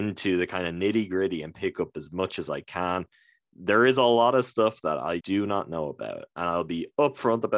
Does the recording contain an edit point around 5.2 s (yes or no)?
yes